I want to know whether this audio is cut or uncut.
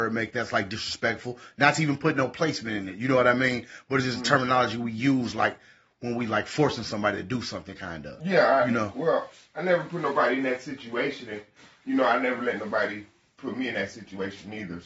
uncut